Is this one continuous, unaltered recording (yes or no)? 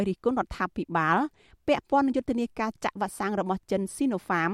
yes